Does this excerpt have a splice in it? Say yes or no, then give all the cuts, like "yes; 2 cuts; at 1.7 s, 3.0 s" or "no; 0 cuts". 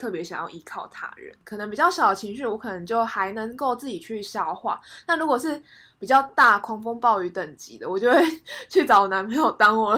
no; 0 cuts